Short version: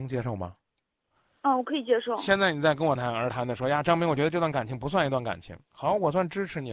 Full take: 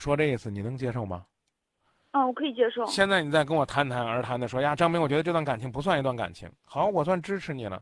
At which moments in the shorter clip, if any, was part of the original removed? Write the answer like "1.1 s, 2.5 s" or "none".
3.0 s